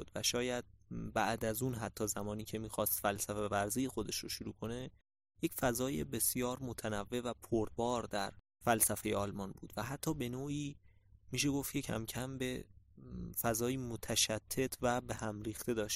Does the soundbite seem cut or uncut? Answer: uncut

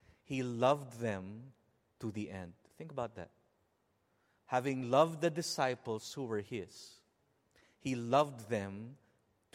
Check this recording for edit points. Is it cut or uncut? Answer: uncut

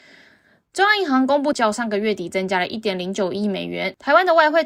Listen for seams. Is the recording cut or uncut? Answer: cut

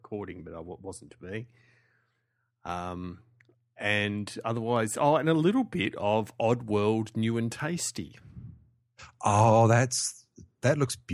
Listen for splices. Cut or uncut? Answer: uncut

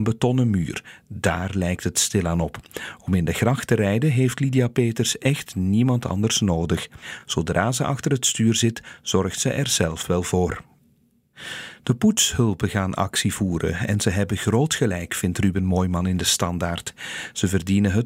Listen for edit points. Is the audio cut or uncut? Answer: uncut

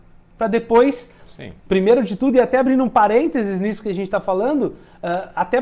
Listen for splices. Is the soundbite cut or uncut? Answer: cut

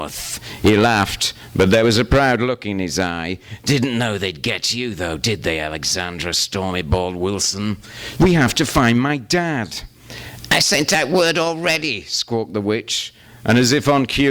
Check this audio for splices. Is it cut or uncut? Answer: cut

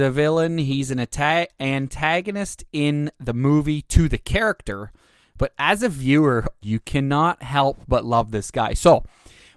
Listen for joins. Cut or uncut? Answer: cut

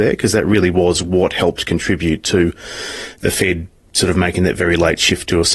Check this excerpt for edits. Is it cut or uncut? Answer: uncut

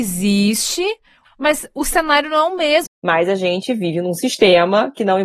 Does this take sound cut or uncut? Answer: cut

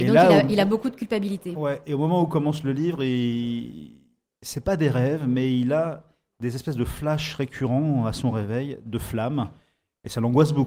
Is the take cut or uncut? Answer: uncut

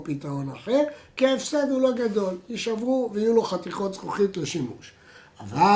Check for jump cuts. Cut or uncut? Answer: uncut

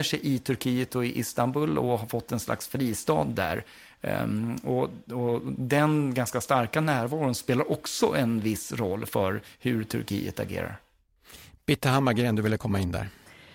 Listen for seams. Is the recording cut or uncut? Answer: uncut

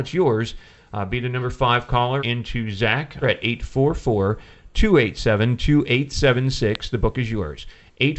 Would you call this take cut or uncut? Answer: cut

